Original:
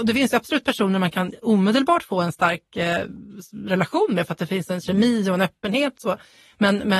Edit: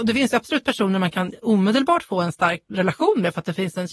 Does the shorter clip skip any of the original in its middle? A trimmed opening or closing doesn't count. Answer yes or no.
yes